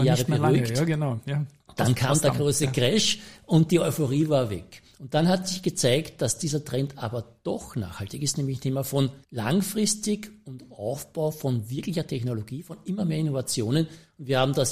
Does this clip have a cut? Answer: yes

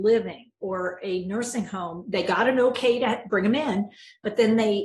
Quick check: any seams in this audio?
no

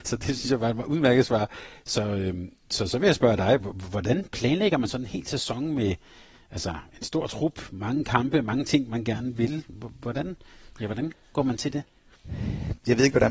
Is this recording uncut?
yes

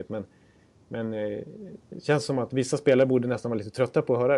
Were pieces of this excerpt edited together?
no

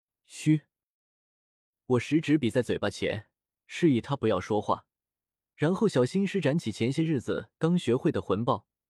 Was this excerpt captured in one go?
yes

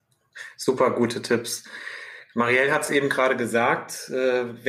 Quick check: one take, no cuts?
yes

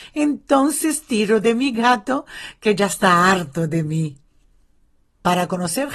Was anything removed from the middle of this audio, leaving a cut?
no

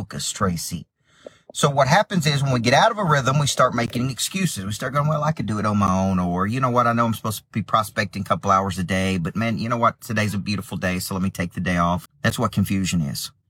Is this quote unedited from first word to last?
no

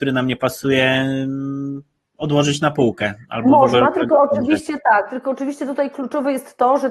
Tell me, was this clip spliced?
no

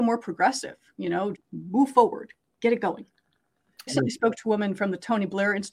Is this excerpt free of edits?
no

